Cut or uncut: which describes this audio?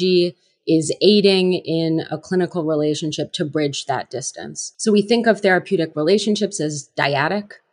cut